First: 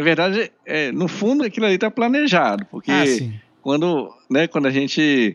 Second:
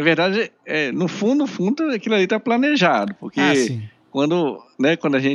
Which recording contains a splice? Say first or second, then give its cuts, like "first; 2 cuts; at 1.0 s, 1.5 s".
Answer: first; 1 cut; at 1.4 s